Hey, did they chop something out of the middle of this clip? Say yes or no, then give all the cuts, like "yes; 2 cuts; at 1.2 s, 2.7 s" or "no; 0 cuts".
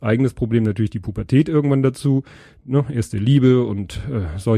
no; 0 cuts